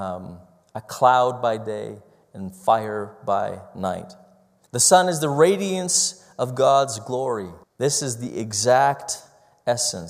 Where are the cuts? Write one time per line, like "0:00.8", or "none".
0:04.7
0:07.6